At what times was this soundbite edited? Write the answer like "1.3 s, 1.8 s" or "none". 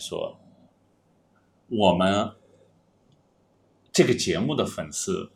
none